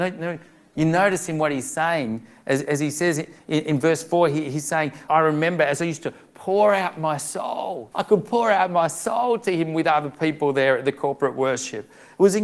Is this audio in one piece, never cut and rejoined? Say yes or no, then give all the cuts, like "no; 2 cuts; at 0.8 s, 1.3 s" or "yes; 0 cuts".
no; 2 cuts; at 5.1 s, 7.9 s